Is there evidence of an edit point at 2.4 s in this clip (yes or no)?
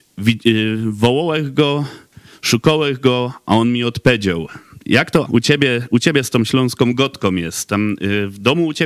no